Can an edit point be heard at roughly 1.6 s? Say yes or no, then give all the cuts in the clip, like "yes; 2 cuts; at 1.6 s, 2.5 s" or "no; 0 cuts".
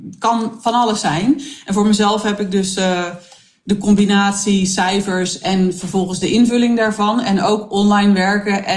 no; 0 cuts